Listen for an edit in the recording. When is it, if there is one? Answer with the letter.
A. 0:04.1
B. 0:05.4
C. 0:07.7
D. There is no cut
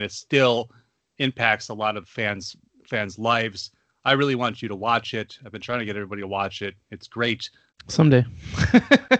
C